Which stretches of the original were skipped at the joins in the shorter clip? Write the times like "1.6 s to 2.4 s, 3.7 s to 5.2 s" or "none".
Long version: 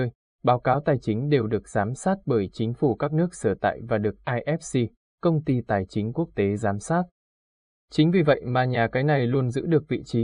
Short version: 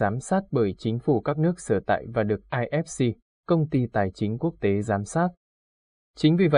none

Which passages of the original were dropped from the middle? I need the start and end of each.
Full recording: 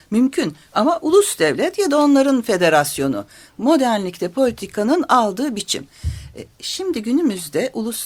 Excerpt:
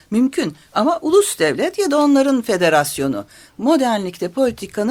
none

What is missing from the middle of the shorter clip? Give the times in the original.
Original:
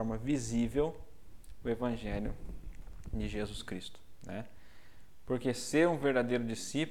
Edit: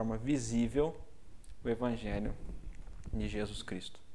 none

